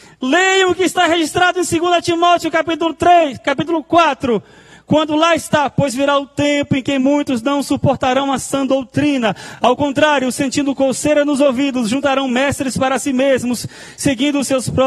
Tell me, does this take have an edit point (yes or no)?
no